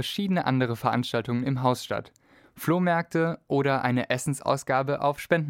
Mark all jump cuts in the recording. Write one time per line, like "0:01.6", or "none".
0:02.4